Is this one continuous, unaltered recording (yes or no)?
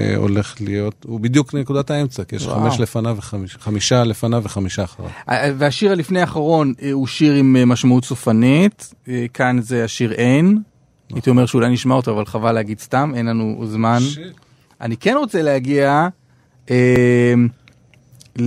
yes